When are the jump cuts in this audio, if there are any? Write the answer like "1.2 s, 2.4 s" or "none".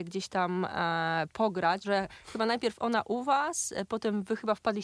1.8 s